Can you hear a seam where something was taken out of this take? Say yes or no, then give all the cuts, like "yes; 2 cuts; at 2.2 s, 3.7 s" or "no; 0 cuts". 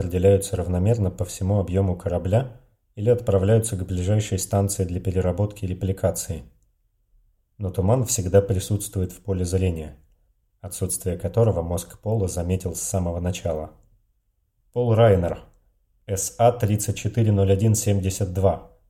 yes; 2 cuts; at 10.4 s, 14.6 s